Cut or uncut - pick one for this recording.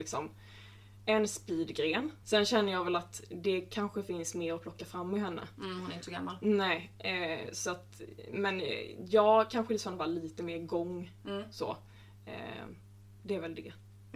cut